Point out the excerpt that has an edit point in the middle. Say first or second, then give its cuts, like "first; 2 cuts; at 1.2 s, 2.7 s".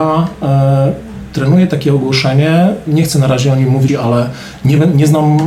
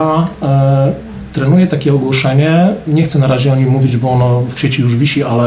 first; 1 cut; at 3.9 s